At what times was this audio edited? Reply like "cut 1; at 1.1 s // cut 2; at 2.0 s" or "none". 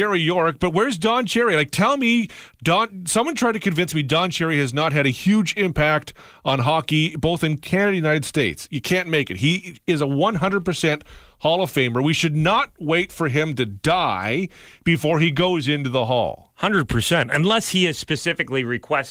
none